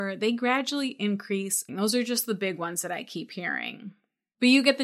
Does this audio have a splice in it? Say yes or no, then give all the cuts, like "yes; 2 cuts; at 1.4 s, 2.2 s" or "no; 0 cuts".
yes; 1 cut; at 1.7 s